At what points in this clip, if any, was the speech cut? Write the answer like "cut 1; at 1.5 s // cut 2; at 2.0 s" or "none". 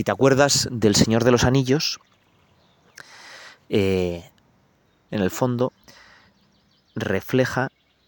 cut 1; at 5.1 s